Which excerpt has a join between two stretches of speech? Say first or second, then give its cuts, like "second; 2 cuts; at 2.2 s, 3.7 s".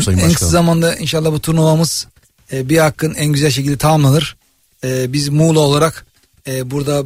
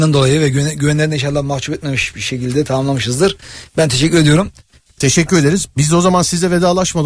second; 1 cut; at 4.9 s